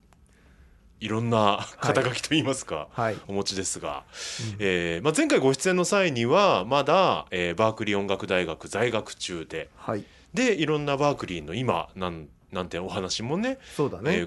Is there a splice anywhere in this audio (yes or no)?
no